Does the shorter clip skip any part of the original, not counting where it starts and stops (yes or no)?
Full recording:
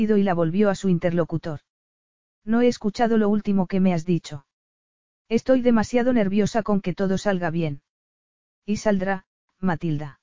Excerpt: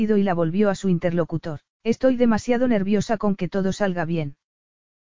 yes